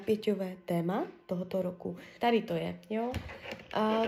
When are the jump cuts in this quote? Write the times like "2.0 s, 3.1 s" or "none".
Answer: 2.2 s